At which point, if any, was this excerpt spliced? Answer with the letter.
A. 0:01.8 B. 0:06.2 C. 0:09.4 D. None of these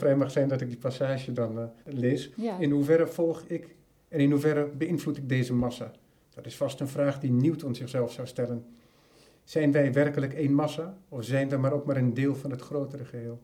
A